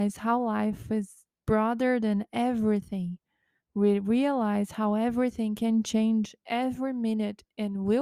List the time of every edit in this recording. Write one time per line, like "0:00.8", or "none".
none